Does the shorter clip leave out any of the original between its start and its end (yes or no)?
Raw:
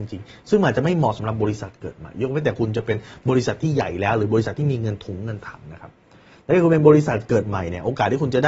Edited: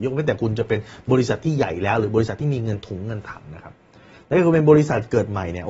no